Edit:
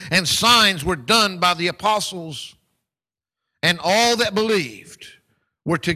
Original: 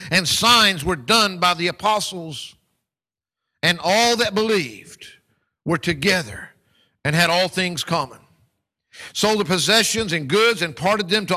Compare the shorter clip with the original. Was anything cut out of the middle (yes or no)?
no